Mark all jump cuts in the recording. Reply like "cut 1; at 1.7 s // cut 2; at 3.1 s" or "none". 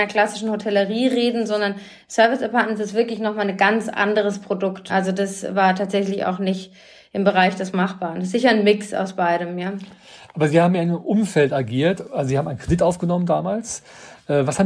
cut 1; at 4.9 s